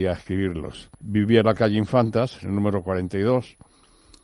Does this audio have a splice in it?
yes; 1 cut; at 0.9 s

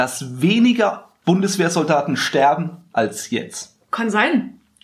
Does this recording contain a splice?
no; 0 cuts

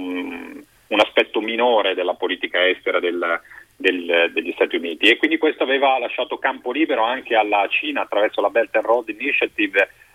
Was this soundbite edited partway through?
no; 0 cuts

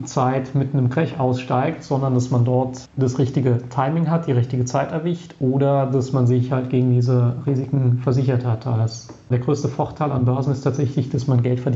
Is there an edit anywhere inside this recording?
no; 0 cuts

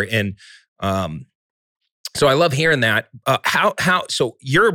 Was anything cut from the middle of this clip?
no; 0 cuts

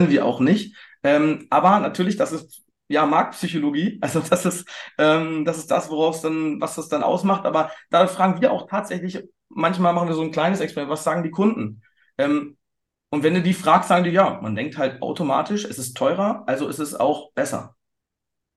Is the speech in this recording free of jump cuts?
yes; 0 cuts

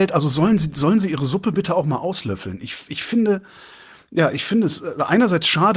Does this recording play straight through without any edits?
yes; 0 cuts

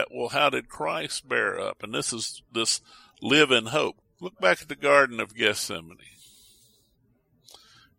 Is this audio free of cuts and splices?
no; 1 cut; at 4.0 s

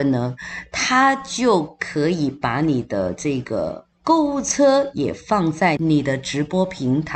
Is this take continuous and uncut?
no; 1 cut; at 5.8 s

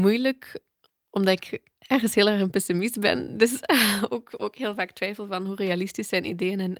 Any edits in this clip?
no; 0 cuts

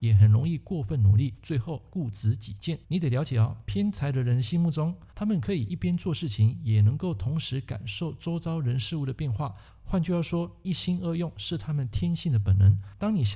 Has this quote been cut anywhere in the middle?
yes; 2 cuts; at 2.8 s, 5.1 s

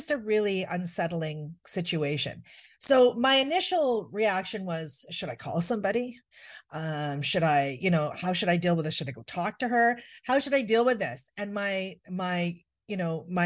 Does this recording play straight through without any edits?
yes; 0 cuts

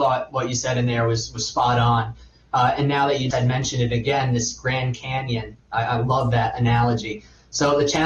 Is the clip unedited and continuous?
no; 1 cut; at 3.3 s

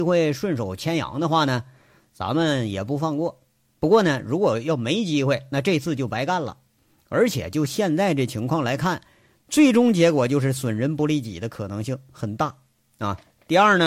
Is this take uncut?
yes; 0 cuts

